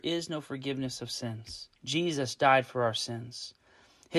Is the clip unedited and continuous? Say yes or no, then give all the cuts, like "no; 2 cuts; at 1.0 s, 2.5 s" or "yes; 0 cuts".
no; 1 cut; at 1.8 s